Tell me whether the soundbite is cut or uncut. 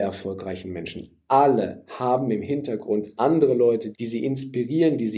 cut